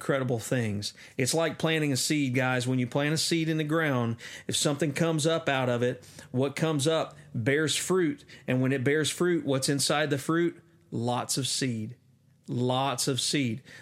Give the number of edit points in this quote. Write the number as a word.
zero